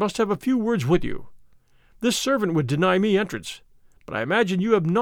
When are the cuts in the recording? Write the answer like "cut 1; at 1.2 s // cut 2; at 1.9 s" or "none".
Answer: none